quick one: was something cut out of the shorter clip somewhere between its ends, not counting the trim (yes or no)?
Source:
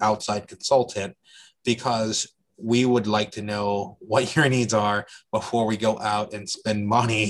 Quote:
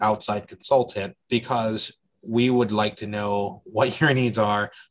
yes